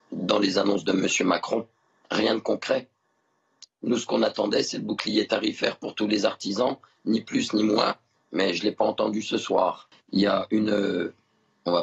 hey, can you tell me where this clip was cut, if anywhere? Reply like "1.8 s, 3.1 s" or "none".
9.9 s